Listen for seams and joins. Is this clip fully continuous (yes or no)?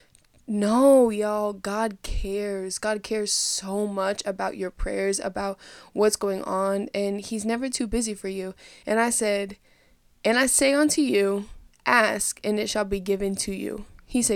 no